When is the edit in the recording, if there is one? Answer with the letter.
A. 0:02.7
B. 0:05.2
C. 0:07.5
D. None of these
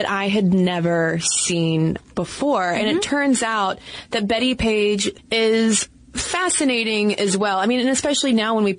B